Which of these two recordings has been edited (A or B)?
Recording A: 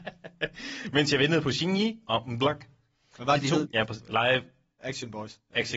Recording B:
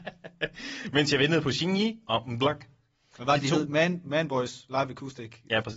A